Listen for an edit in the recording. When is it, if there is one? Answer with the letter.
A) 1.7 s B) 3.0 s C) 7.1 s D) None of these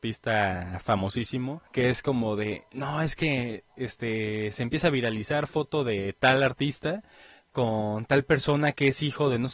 A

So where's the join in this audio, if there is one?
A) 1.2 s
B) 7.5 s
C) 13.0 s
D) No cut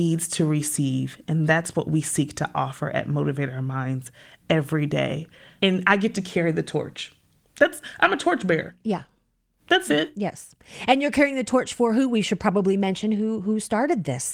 D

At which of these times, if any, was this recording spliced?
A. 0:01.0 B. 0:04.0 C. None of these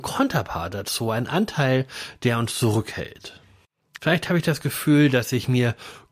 B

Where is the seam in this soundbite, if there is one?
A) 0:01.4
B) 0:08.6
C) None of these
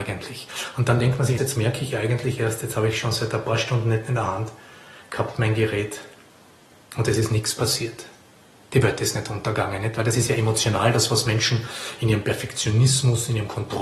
A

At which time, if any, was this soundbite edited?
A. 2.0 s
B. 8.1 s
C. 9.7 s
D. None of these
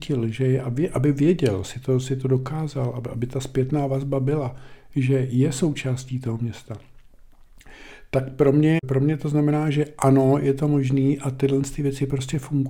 D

